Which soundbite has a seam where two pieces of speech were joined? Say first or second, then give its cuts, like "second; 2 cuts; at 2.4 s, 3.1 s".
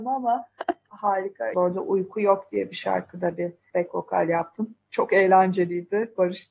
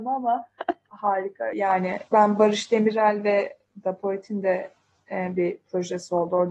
first; 1 cut; at 1.5 s